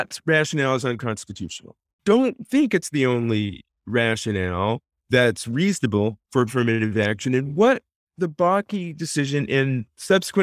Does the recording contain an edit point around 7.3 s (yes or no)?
no